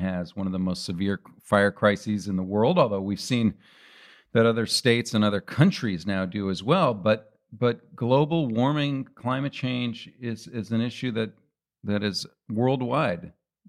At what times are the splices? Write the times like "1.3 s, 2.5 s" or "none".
none